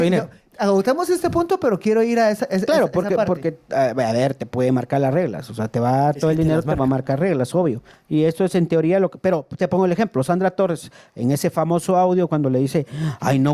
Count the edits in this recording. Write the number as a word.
zero